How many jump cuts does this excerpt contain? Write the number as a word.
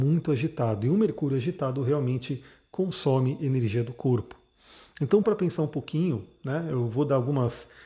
one